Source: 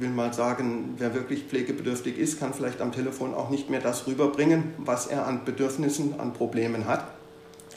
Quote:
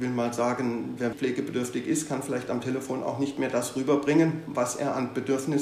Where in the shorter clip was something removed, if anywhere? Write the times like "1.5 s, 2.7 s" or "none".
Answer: 1.1 s

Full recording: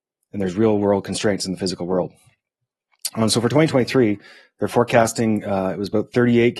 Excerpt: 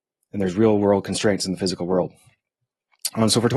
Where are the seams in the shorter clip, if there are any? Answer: none

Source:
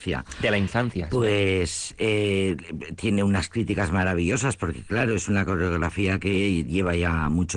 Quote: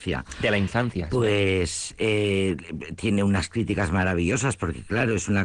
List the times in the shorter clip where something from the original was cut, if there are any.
none

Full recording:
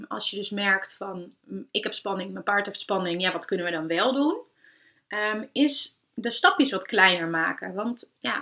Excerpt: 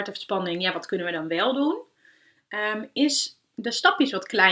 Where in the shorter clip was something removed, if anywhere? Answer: none

